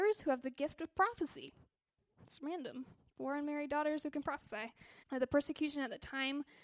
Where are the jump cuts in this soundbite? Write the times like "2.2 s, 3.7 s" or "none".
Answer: 3.1 s, 5.0 s